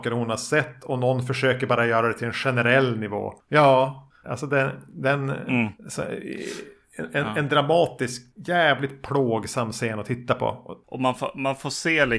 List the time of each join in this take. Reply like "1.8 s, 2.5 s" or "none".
4.2 s, 5.7 s